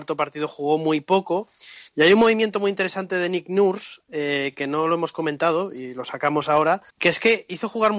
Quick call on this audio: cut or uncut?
cut